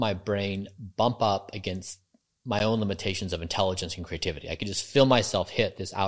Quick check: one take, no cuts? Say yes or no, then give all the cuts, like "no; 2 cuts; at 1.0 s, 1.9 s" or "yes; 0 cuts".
yes; 0 cuts